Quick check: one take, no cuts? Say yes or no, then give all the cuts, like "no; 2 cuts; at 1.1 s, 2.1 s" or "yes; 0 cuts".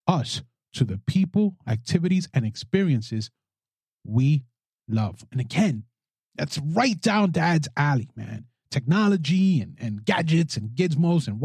yes; 0 cuts